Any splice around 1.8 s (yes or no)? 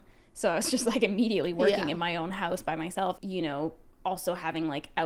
no